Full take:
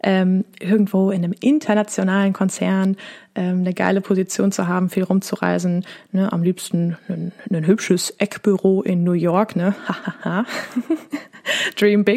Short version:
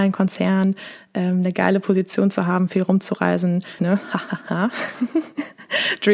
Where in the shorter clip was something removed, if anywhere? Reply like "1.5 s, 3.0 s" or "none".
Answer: 3.8 s